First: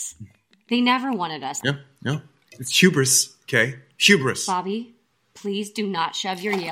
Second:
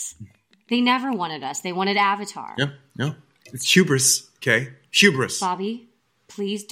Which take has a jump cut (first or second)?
first